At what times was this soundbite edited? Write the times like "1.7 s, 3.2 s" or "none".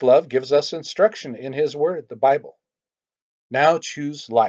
3.4 s